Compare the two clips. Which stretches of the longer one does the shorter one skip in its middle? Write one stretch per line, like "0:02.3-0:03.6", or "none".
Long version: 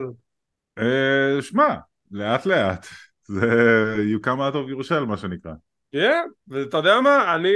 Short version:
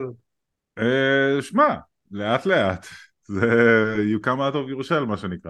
none

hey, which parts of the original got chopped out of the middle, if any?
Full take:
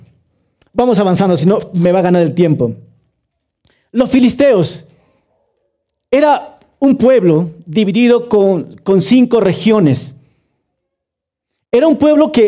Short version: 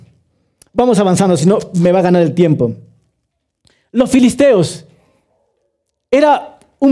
none

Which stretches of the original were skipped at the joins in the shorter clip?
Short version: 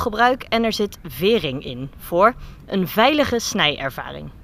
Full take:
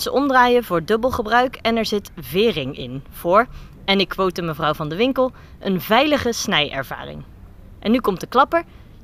0:03.8-0:05.6

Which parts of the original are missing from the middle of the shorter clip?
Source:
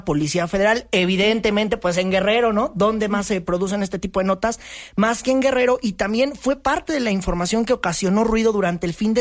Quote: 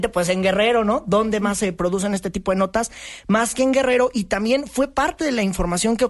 none

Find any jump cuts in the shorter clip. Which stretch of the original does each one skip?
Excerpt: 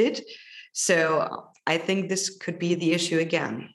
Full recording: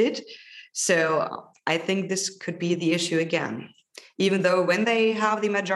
none

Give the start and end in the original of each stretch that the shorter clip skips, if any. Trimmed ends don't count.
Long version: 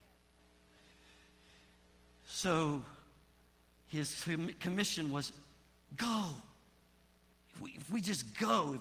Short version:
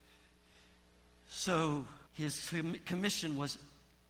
0:03.0-0:03.8

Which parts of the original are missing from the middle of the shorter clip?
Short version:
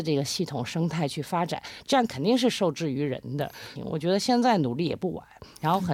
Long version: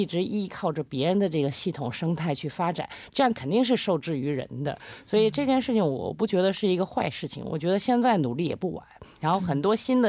0:05.0-0:07.4

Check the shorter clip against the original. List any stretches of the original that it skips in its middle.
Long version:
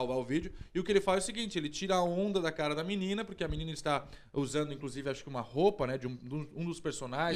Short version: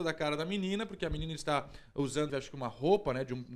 0:04.7-0:05.0

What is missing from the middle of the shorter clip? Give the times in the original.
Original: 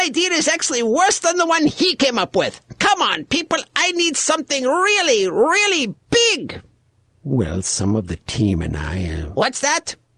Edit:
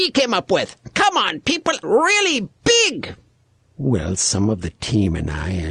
0:03.7-0:05.3

